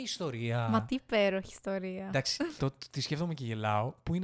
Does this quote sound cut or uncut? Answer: cut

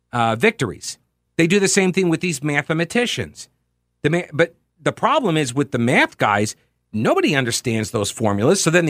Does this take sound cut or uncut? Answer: cut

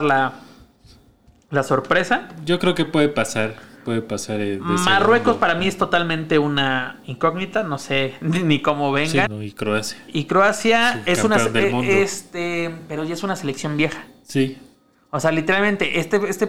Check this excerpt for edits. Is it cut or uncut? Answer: cut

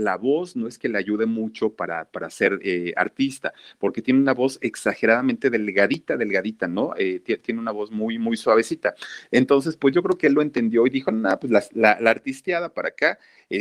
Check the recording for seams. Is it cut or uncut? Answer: uncut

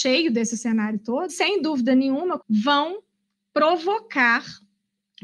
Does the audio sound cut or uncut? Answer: cut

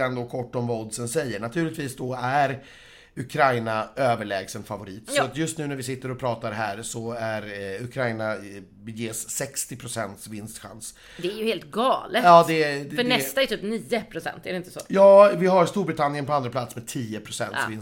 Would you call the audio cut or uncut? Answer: uncut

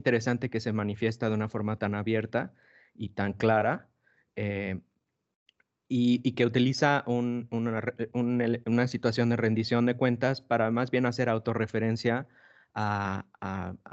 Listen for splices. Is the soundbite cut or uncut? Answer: uncut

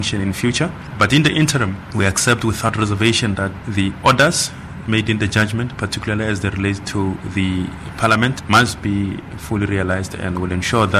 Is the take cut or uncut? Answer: uncut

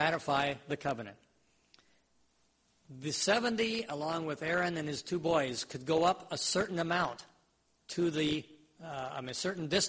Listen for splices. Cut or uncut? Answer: uncut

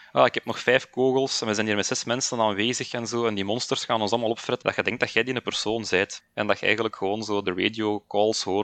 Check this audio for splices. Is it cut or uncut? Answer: cut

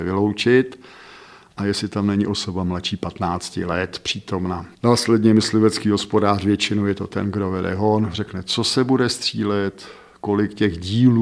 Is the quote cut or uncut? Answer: cut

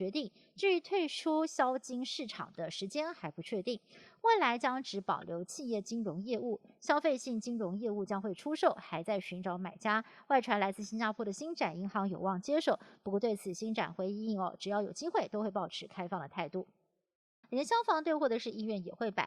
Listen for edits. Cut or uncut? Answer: cut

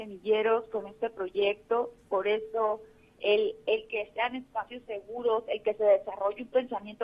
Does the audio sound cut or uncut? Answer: uncut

